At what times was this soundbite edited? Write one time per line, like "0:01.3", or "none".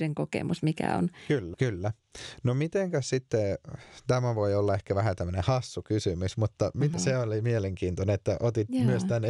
0:01.5
0:06.9